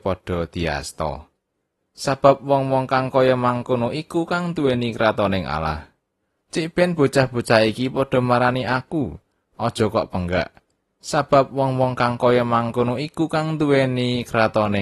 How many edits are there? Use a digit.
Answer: 2